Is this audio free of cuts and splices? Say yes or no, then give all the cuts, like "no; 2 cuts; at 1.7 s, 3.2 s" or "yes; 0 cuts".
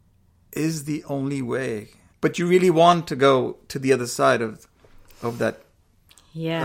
no; 1 cut; at 2.1 s